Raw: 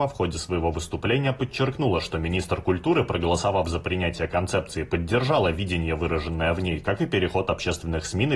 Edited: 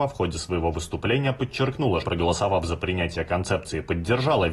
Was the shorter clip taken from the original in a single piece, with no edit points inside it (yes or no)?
no